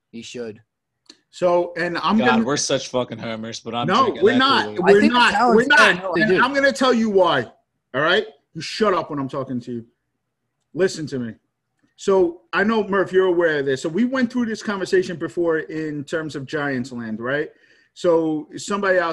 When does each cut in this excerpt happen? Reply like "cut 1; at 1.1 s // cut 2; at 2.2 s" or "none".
cut 1; at 6.2 s